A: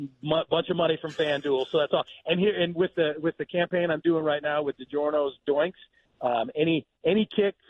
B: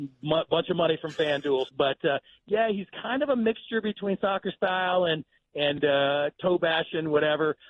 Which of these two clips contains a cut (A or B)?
B